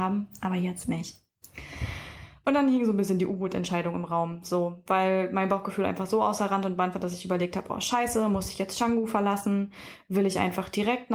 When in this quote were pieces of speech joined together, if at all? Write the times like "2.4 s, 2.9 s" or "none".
none